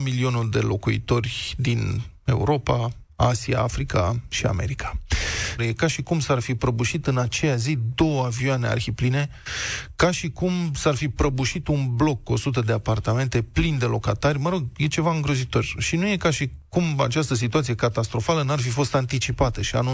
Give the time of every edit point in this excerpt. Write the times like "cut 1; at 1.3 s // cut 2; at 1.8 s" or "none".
cut 1; at 3.1 s // cut 2; at 5.6 s